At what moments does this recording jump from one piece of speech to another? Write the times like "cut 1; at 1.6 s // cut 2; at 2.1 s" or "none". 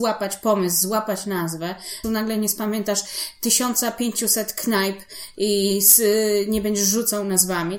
cut 1; at 2.0 s